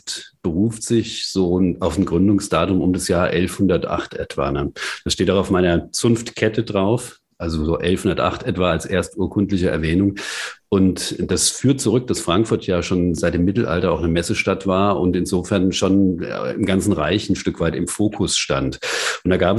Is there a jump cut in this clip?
no; 0 cuts

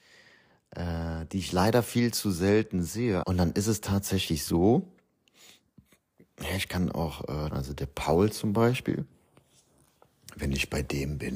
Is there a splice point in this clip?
yes; 2 cuts; at 3.2 s, 7.5 s

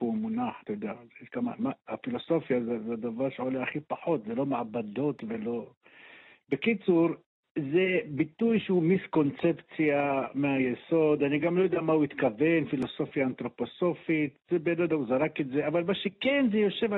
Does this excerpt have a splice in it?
no; 0 cuts

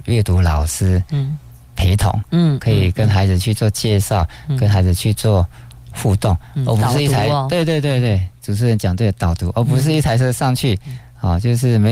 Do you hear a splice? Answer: no; 0 cuts

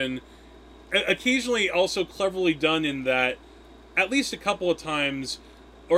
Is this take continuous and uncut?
yes; 0 cuts

